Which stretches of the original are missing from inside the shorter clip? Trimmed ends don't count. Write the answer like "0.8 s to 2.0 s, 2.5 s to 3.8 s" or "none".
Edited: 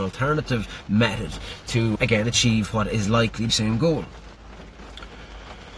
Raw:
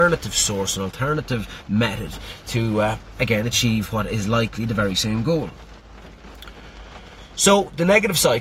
2.7 s to 3.1 s, 4.7 s to 4.9 s